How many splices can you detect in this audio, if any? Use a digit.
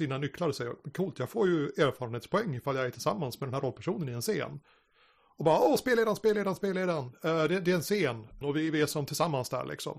1